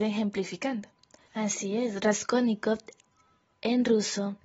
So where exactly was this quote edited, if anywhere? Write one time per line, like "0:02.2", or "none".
0:01.3